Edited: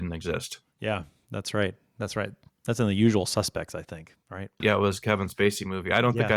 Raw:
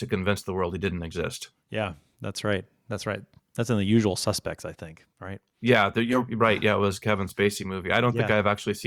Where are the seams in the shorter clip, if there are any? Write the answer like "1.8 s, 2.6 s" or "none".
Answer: 4.6 s